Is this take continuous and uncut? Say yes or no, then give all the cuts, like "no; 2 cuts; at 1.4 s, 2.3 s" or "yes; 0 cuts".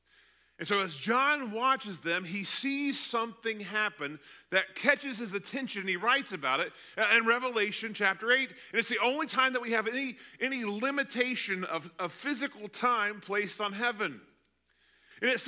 yes; 0 cuts